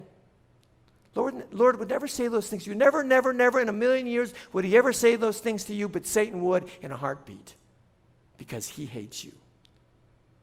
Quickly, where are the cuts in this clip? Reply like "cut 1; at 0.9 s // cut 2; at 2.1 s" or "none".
cut 1; at 1.5 s